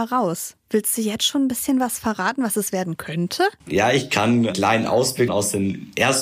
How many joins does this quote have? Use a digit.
2